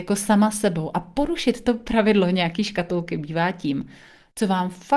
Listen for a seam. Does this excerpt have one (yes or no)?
no